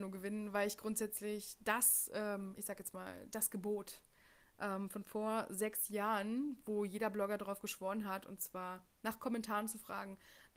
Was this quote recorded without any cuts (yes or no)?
yes